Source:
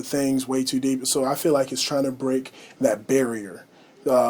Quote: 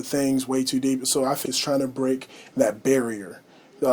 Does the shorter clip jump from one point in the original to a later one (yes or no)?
yes